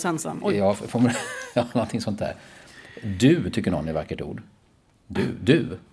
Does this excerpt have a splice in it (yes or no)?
no